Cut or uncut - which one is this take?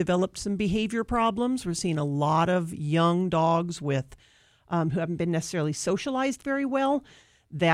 uncut